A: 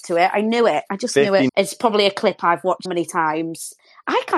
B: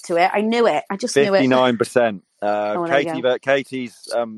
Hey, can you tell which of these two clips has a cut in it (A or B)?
A